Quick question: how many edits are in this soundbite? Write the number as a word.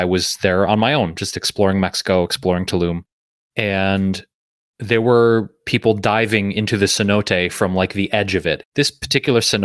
two